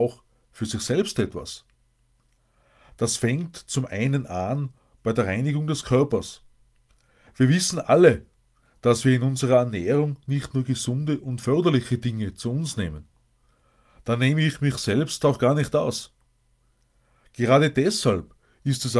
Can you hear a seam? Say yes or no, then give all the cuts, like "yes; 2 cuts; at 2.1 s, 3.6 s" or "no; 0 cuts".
no; 0 cuts